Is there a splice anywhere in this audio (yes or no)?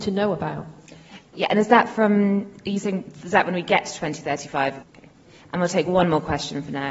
yes